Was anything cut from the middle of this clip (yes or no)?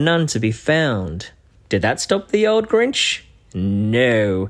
no